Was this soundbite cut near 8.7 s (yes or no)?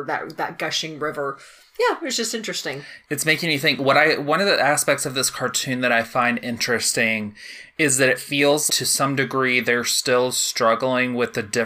yes